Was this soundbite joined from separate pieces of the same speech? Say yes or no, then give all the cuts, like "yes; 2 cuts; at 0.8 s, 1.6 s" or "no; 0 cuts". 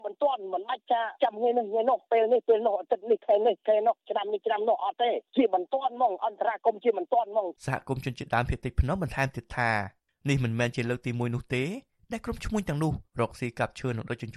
yes; 2 cuts; at 7.6 s, 13.1 s